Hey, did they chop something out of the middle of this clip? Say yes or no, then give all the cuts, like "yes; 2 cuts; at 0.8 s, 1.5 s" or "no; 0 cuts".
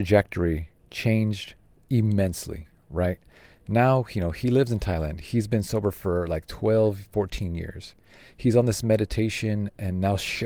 no; 0 cuts